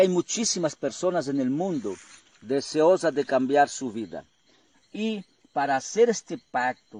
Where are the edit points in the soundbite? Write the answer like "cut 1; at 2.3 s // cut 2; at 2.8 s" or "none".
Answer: cut 1; at 4.7 s

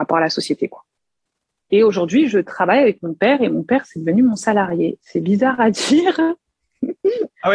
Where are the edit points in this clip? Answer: cut 1; at 1.5 s

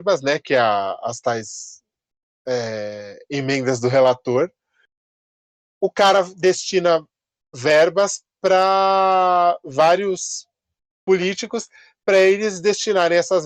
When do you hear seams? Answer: none

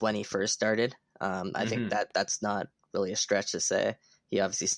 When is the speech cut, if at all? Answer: none

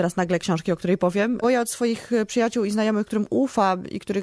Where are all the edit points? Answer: cut 1; at 1.4 s // cut 2; at 3.1 s

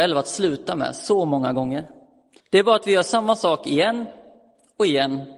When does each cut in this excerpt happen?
cut 1; at 2.4 s

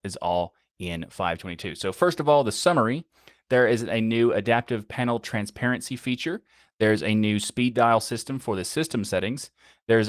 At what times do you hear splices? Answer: none

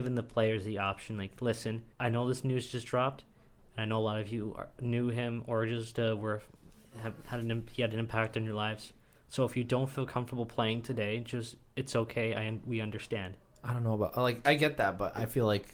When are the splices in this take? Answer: cut 1; at 1.9 s // cut 2; at 14.4 s

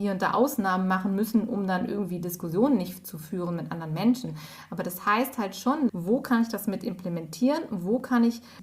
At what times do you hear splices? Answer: cut 1; at 5.9 s

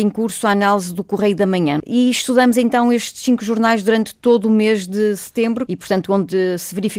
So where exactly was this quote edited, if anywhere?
cut 1; at 1.8 s // cut 2; at 5.7 s

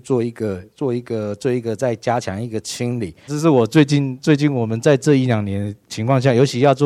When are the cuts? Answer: cut 1; at 3.3 s

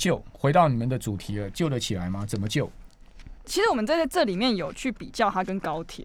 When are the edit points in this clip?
cut 1; at 3.4 s

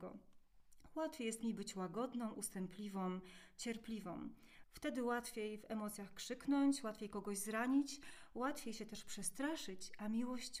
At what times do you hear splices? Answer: cut 1; at 4.6 s

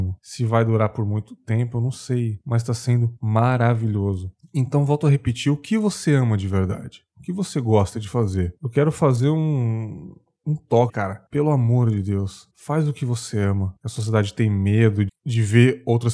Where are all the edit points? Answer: cut 1; at 10.9 s // cut 2; at 13.8 s // cut 3; at 15.1 s

